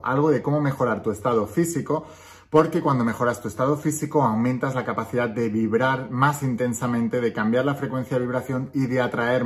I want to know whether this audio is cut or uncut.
uncut